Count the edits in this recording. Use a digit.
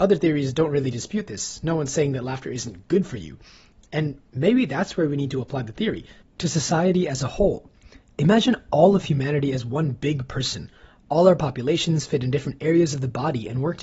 1